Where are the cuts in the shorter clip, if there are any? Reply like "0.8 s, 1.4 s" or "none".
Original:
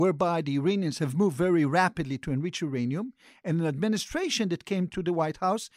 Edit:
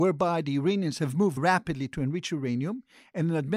1.4 s